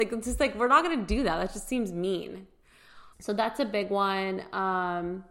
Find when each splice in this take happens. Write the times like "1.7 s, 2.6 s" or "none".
3.1 s